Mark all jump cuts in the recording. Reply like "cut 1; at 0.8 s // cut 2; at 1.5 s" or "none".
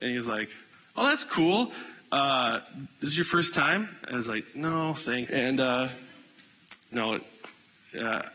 cut 1; at 5.3 s // cut 2; at 6.9 s